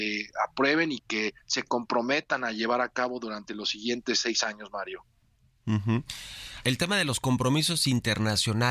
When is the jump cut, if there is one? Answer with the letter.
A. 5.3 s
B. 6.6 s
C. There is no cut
B